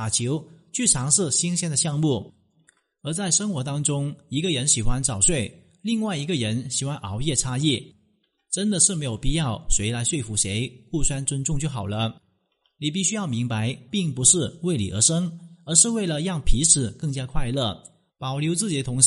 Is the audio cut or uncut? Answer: cut